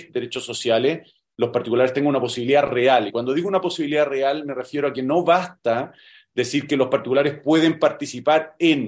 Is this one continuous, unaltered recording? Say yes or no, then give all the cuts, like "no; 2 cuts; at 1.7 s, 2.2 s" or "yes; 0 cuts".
yes; 0 cuts